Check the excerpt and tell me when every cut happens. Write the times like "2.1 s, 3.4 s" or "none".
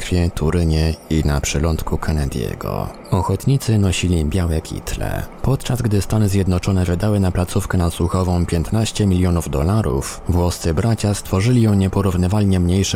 none